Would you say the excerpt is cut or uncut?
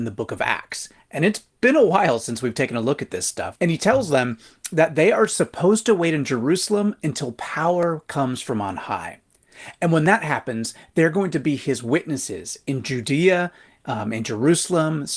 cut